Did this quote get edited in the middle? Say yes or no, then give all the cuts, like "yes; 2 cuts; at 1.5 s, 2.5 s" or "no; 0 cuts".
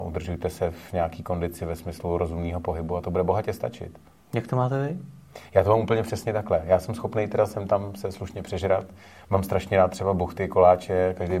no; 0 cuts